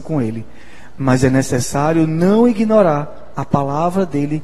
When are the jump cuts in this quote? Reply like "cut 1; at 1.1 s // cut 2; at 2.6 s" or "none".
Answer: none